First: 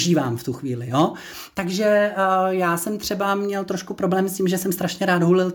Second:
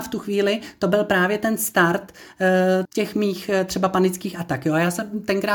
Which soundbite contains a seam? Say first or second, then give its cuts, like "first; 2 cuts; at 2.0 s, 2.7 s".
second; 1 cut; at 2.8 s